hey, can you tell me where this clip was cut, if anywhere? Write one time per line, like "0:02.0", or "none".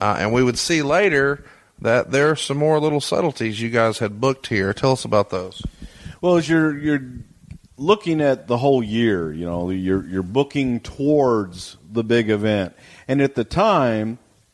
none